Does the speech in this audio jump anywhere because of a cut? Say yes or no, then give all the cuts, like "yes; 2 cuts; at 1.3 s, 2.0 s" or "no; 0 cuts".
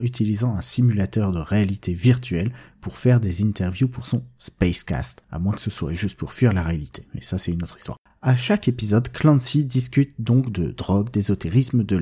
no; 0 cuts